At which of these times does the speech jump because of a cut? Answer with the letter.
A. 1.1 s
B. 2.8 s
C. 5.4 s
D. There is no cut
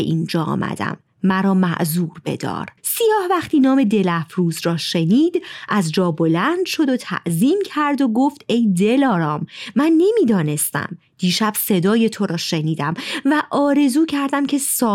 B